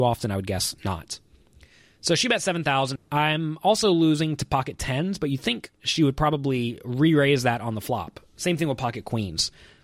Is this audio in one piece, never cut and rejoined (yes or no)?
no